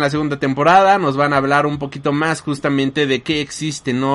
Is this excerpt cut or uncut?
uncut